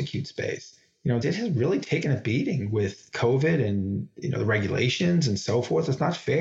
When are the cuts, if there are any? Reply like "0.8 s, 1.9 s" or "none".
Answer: 1.2 s